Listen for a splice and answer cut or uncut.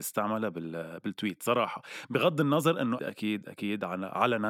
cut